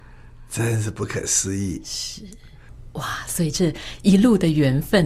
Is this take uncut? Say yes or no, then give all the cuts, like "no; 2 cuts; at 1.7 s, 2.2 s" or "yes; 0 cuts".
no; 1 cut; at 2.7 s